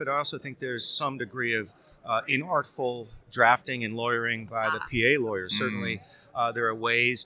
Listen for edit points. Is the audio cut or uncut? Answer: uncut